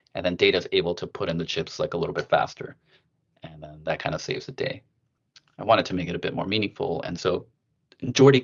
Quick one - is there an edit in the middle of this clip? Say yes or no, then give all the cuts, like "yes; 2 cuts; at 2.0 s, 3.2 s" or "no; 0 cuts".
no; 0 cuts